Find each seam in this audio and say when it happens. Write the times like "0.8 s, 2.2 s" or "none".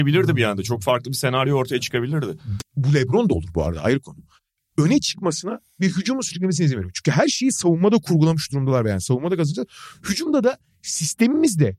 2.6 s